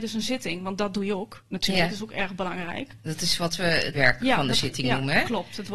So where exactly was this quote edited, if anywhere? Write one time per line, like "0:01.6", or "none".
0:03.9